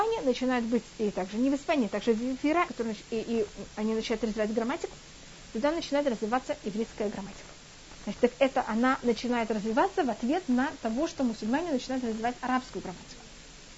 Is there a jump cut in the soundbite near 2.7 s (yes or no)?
yes